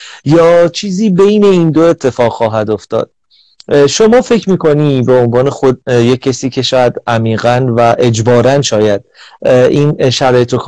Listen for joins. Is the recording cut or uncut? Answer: uncut